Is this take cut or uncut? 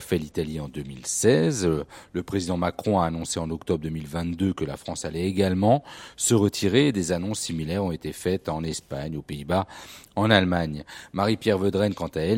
uncut